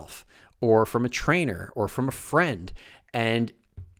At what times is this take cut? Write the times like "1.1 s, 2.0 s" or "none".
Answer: none